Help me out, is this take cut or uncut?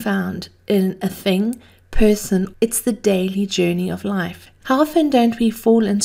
cut